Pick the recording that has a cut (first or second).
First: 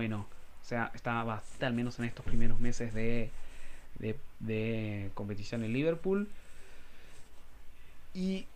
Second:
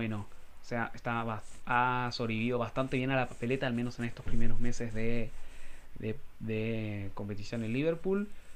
first